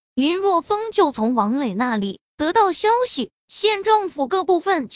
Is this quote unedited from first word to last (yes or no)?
yes